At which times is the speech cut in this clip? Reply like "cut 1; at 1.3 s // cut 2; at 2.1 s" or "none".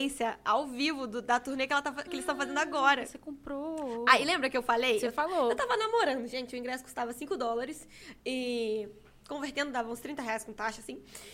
none